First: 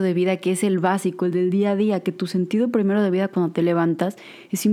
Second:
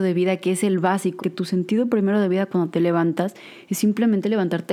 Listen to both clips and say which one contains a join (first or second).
second